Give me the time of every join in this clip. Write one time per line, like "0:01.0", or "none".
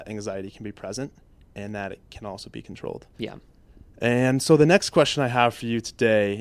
0:03.1